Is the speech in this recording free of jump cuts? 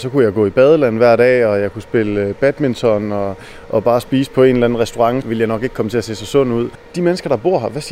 no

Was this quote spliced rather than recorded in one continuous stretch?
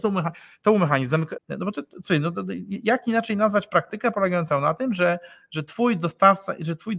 yes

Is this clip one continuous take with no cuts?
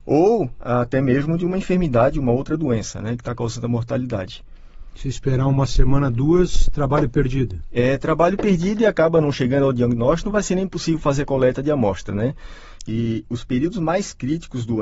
no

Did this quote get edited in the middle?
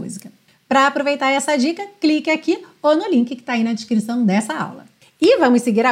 no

